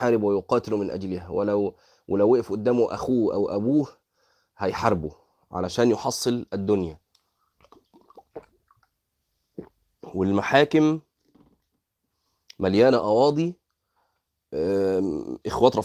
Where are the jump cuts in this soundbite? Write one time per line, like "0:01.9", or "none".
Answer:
none